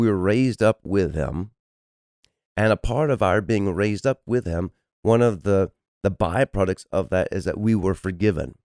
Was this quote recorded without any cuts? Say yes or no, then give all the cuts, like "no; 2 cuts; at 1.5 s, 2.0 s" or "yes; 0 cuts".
yes; 0 cuts